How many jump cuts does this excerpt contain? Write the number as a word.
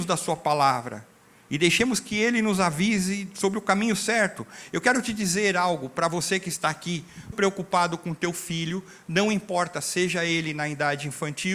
one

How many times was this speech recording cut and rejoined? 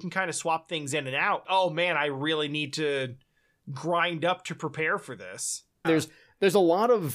two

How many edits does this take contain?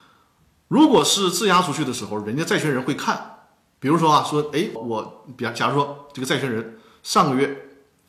one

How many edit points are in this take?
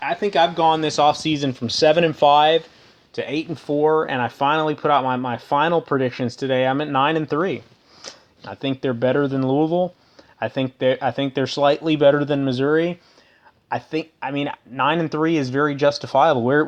one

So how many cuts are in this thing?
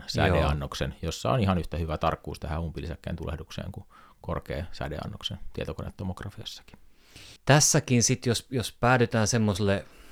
one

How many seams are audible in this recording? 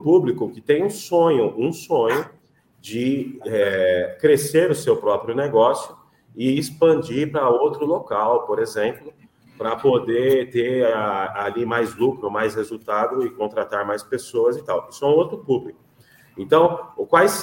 zero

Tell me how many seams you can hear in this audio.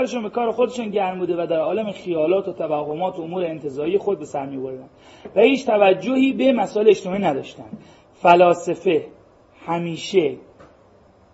zero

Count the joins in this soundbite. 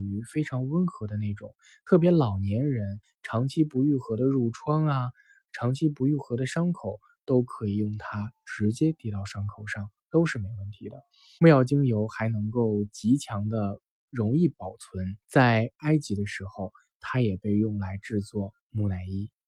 two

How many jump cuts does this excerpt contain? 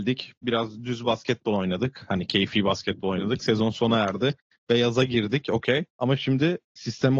one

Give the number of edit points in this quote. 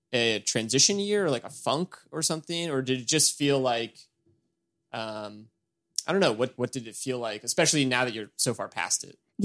one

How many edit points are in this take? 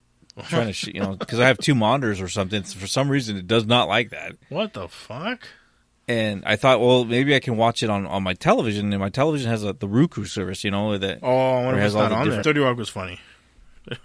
one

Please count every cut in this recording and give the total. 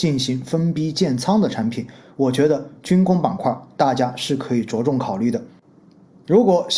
zero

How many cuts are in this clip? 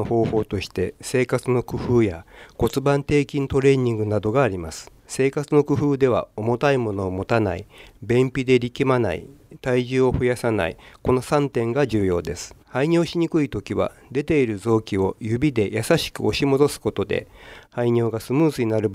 two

